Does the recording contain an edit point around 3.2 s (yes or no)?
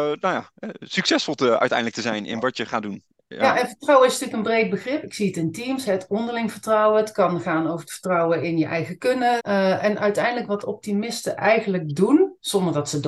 no